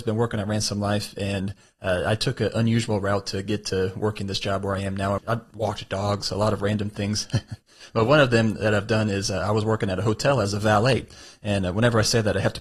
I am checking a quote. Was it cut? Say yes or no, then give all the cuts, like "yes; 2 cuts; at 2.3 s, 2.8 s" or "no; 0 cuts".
yes; 1 cut; at 5.2 s